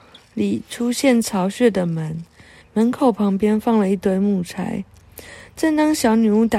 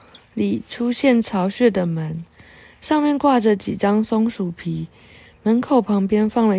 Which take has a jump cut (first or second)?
first